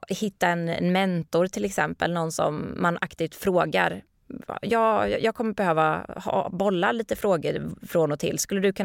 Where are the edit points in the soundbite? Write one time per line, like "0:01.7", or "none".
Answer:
none